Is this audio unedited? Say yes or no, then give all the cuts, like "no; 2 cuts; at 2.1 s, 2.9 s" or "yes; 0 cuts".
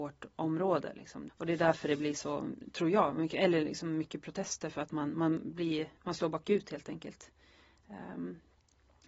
no; 2 cuts; at 1.3 s, 6.0 s